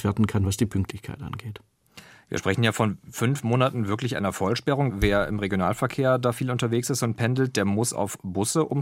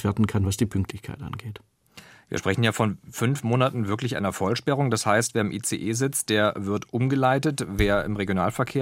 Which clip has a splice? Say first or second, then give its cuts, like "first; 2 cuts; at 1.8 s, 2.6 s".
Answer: first; 1 cut; at 4.9 s